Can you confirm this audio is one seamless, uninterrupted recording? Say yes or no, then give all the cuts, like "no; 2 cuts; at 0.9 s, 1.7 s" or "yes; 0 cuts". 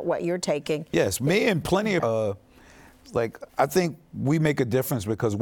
no; 2 cuts; at 2.0 s, 3.5 s